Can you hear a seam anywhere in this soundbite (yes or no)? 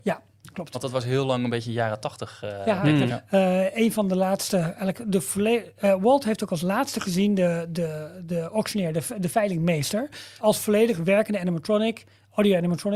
yes